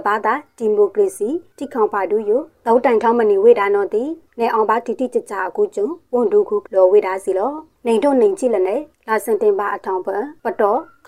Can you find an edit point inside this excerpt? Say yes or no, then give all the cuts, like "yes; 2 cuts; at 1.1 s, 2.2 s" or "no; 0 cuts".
yes; 1 cut; at 6.6 s